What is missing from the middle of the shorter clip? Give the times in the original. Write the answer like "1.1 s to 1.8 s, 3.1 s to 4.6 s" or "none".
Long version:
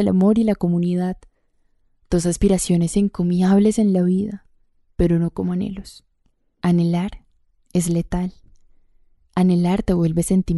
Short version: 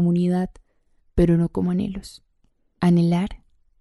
1.7 s to 4.8 s